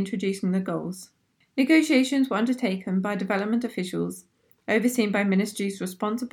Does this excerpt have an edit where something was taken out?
no; 0 cuts

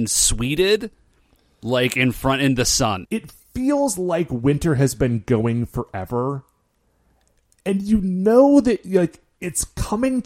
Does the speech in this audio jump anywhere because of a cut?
yes; 1 cut; at 3.0 s

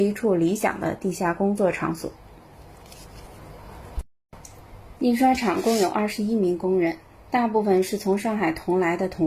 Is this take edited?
yes; 1 cut; at 5.0 s

